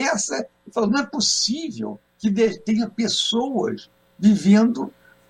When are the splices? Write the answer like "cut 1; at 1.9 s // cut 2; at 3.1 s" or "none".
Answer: cut 1; at 2.1 s